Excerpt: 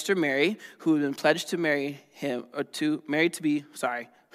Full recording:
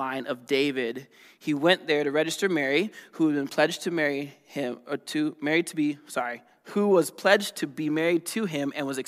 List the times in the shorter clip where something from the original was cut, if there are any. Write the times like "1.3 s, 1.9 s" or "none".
none